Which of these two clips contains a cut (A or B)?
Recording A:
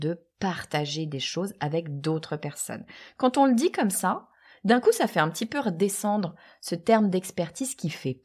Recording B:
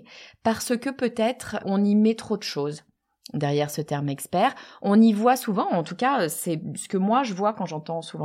B